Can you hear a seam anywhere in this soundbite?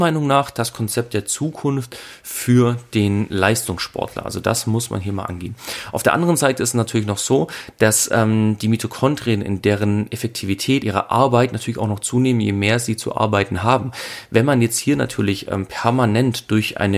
yes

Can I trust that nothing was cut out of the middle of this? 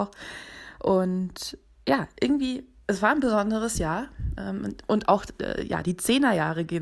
yes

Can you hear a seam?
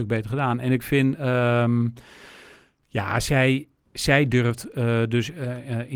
no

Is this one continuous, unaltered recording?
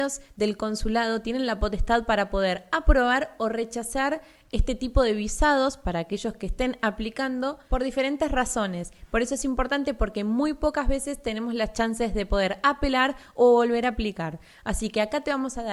yes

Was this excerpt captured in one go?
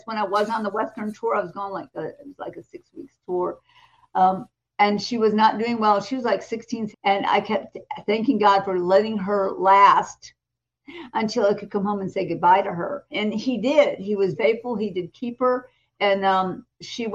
no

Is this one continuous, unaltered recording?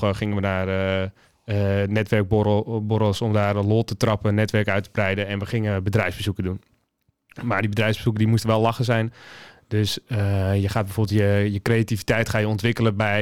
yes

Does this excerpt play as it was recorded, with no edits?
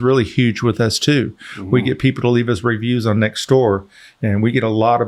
yes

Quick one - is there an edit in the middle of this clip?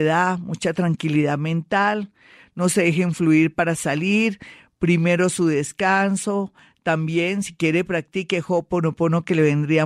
no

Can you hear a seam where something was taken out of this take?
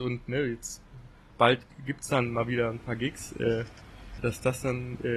yes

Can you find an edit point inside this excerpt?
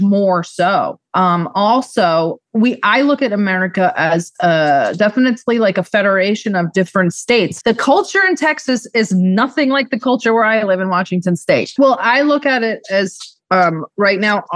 yes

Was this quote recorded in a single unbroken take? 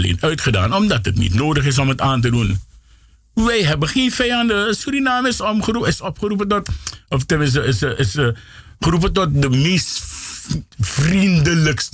yes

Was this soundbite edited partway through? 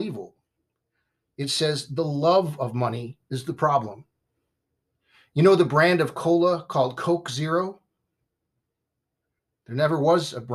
no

